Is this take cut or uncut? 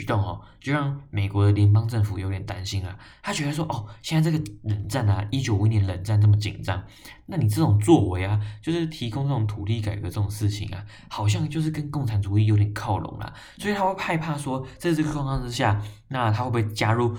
uncut